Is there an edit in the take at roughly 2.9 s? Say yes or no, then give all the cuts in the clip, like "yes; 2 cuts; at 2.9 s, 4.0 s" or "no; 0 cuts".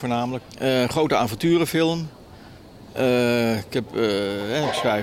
yes; 1 cut; at 2.9 s